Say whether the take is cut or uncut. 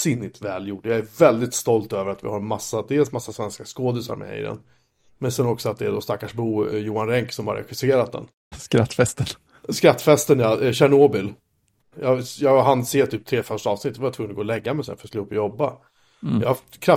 cut